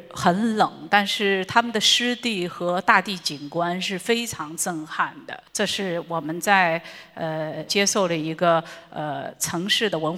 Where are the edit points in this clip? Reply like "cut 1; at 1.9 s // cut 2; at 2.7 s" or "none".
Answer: cut 1; at 7.7 s